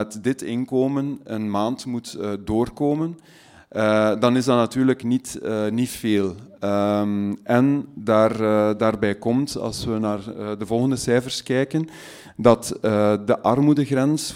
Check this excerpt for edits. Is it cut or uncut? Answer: uncut